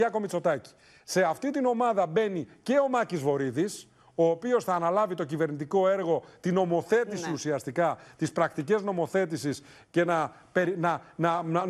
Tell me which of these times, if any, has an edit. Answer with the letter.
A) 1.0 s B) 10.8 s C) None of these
C